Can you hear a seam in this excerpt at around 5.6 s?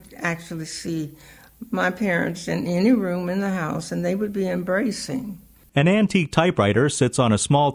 yes; 1 cut; at 5.6 s

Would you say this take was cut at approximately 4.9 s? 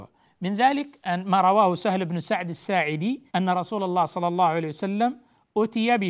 no; 1 cut; at 3.3 s

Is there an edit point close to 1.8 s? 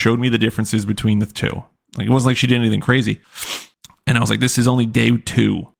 no; 0 cuts

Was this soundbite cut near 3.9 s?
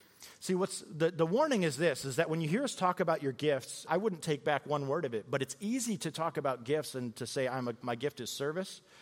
yes; 2 cuts; at 3.9 s, 7.8 s

